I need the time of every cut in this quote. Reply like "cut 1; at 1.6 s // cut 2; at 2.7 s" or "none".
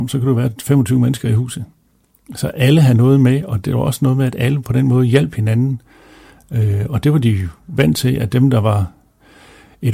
none